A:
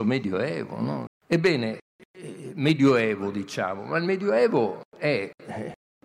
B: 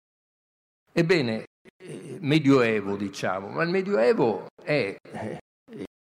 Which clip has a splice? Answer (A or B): A